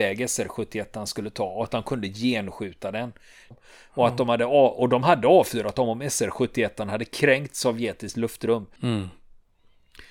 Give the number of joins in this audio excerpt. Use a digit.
2